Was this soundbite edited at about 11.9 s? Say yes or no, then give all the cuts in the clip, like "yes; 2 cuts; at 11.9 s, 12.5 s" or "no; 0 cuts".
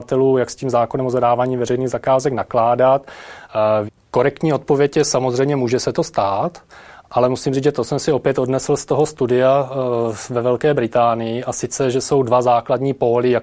no; 1 cut; at 3.9 s